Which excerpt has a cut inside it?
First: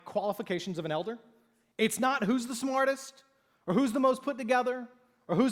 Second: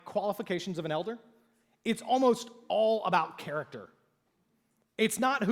first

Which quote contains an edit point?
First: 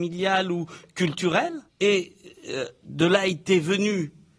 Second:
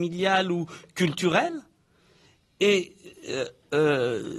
first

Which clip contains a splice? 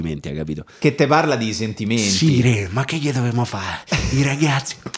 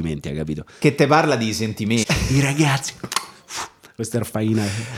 second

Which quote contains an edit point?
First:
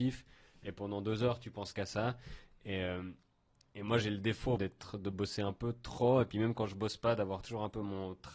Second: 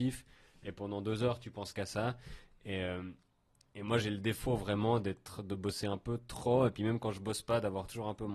first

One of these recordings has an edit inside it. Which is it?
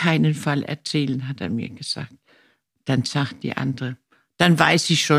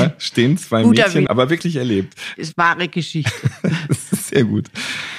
second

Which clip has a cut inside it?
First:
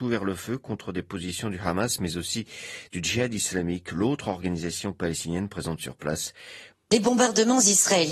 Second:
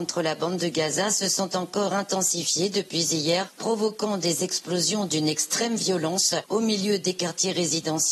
first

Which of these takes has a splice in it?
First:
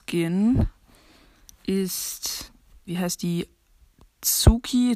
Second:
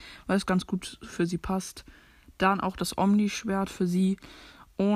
first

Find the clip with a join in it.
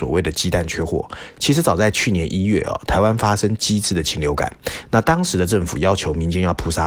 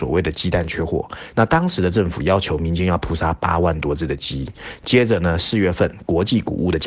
second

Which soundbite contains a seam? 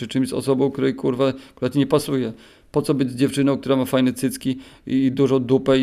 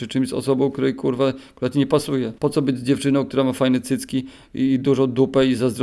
second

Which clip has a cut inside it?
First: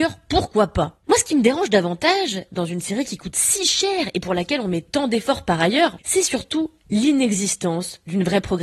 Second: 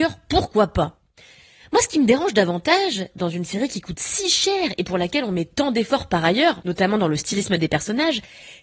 first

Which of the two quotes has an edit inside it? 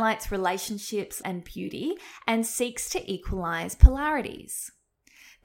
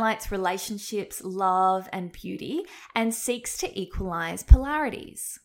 first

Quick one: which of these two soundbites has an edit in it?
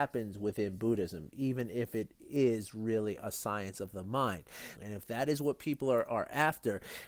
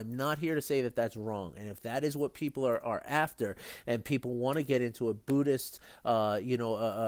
first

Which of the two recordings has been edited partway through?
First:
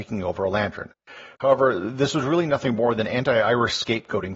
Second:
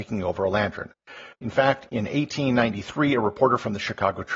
second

